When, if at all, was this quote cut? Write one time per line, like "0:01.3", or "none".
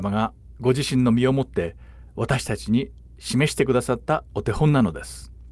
none